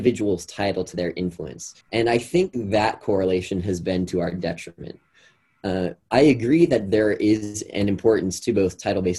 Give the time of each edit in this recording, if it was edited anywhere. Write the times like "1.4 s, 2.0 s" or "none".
1.8 s